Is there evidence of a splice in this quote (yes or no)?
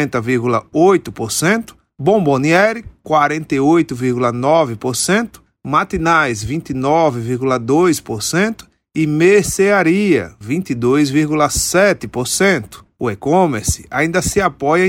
yes